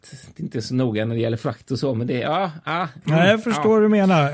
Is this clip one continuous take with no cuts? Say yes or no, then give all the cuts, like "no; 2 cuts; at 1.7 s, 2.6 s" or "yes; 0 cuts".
yes; 0 cuts